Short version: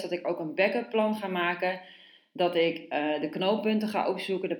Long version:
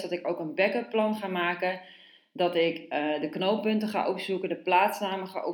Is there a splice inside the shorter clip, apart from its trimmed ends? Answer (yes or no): no